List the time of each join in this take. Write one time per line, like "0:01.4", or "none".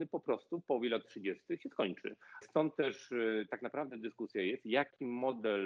0:02.4